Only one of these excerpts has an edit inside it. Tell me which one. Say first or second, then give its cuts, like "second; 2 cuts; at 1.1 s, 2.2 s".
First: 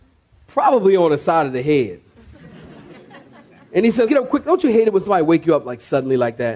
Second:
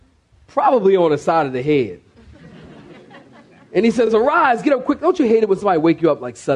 first; 1 cut; at 4.1 s